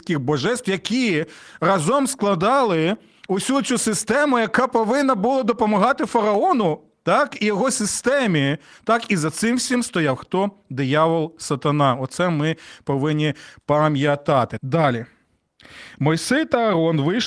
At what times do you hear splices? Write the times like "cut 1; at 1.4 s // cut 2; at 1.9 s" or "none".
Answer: cut 1; at 14.6 s